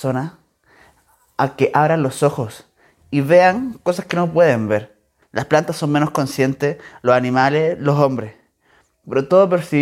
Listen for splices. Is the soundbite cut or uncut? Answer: cut